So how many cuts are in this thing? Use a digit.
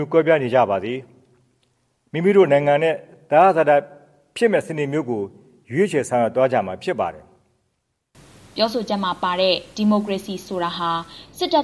0